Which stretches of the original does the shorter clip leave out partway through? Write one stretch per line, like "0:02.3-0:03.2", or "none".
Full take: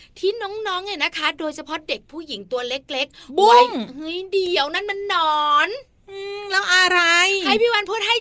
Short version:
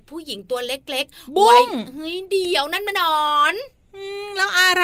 0:04.9-0:05.1